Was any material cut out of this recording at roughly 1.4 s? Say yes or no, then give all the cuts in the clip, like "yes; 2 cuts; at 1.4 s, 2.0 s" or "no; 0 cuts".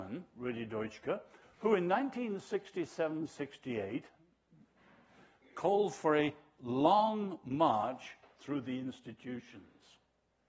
yes; 1 cut; at 1.4 s